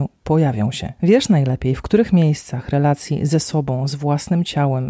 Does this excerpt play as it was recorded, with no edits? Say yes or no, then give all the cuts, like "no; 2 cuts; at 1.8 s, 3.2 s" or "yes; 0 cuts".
no; 1 cut; at 1.0 s